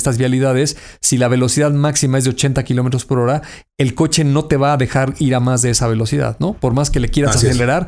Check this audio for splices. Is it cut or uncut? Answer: uncut